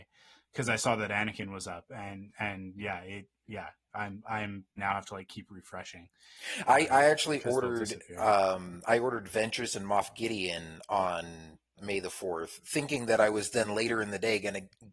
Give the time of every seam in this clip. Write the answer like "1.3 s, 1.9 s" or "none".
4.8 s, 11.8 s